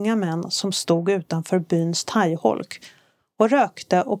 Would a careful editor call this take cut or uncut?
uncut